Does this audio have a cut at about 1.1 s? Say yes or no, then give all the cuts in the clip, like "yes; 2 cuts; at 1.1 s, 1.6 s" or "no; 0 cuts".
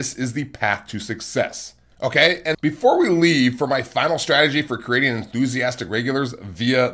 no; 1 cut; at 2.5 s